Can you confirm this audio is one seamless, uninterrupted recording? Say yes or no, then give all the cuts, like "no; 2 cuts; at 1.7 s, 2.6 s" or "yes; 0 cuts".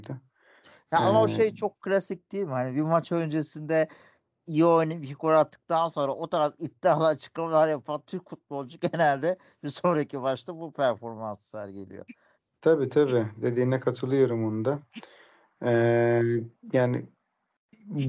yes; 0 cuts